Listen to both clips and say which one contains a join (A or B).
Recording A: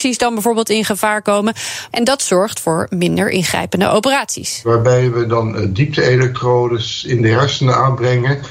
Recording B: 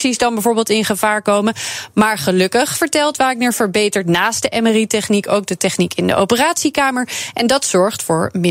A